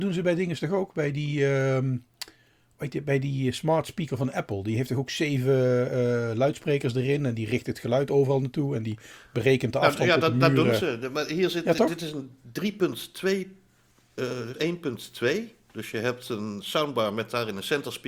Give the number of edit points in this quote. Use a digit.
1